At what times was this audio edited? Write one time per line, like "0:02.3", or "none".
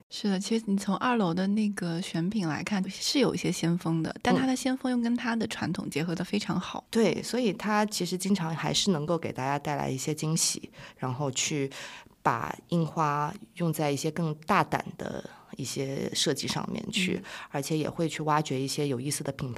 none